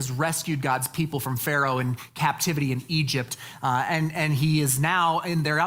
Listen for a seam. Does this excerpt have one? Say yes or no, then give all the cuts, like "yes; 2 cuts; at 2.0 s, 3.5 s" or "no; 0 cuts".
no; 0 cuts